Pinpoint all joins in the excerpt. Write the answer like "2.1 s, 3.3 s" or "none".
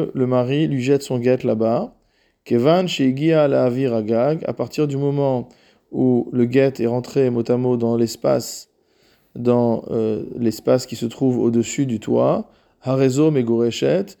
none

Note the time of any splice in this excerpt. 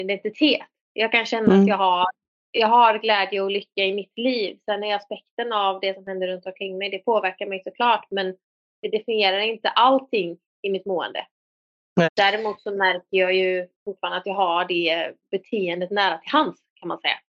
12.1 s, 13.7 s

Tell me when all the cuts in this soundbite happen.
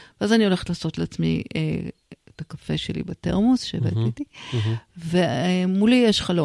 none

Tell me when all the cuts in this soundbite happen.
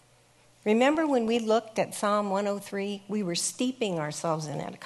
none

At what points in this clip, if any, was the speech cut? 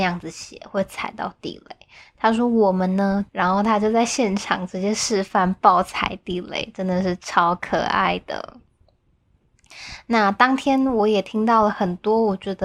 3.3 s

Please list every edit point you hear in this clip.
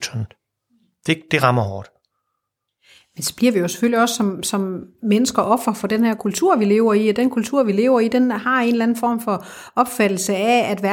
none

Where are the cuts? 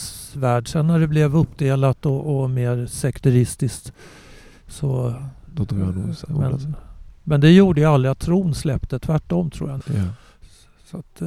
9.8 s

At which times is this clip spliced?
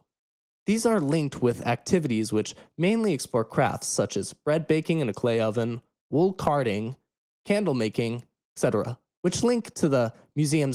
none

